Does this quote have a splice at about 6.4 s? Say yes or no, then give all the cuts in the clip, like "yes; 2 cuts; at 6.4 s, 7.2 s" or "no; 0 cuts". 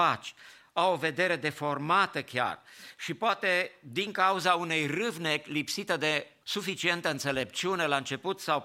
yes; 1 cut; at 6.4 s